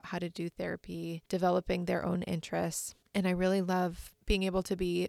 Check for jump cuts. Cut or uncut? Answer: cut